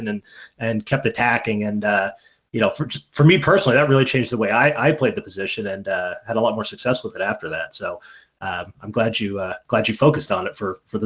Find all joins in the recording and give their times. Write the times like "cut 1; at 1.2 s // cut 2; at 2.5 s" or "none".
none